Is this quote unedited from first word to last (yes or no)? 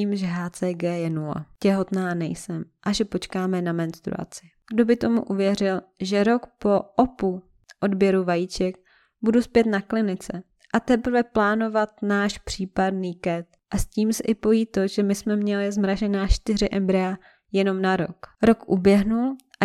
no